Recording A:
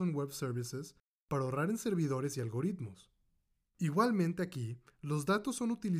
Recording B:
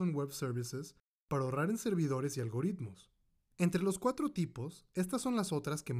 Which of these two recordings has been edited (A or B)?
B